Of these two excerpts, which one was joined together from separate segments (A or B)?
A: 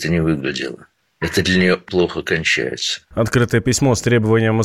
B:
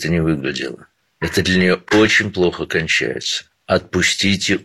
A